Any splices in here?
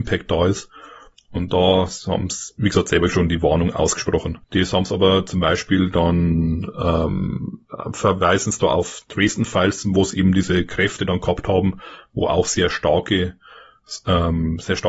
yes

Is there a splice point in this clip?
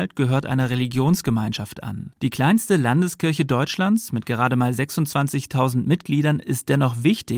yes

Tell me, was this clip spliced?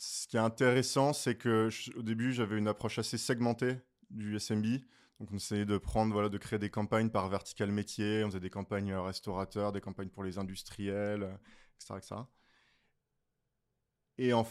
no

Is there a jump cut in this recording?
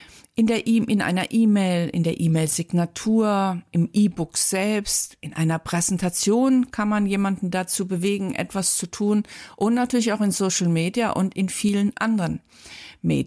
no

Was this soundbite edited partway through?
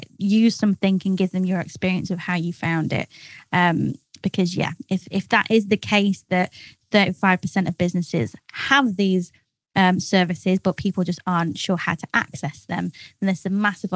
no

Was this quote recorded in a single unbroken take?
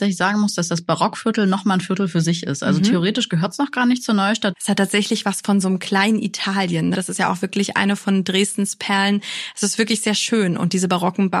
no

